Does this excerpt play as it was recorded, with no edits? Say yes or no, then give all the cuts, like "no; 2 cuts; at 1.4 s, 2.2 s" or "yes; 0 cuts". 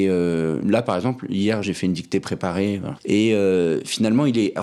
no; 2 cuts; at 1.6 s, 3.0 s